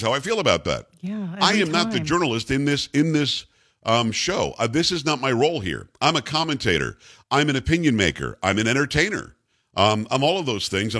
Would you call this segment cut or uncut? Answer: uncut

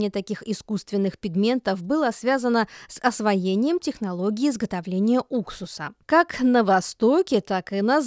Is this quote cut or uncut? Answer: cut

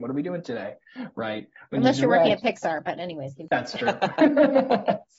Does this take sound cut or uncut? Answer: uncut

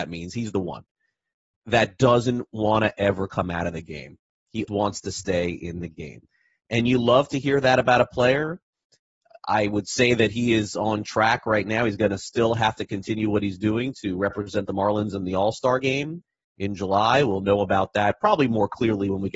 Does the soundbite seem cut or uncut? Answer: cut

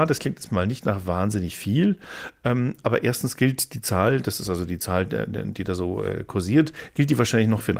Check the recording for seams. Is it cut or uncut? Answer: uncut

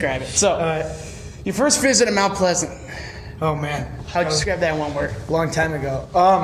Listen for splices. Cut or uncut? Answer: uncut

